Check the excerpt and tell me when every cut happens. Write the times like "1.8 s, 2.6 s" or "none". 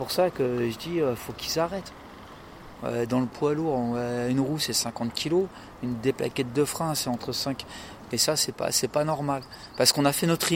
1.2 s, 2.8 s, 8.1 s